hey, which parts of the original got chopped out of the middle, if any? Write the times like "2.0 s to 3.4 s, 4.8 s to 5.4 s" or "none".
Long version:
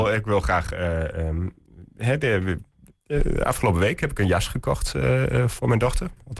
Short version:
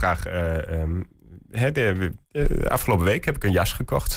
2.7 s to 3.0 s